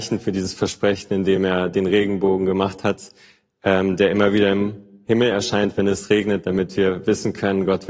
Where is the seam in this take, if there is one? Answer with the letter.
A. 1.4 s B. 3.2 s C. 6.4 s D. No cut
D